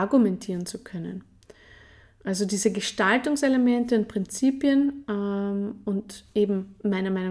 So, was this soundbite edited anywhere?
no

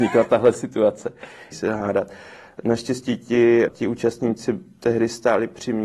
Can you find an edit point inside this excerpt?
yes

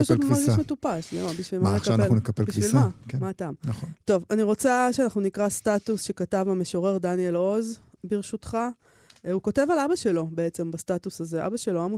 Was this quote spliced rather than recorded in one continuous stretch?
no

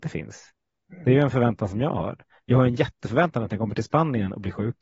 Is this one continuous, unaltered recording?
yes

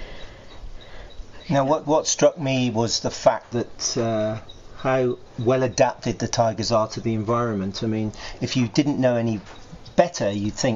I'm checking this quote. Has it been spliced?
no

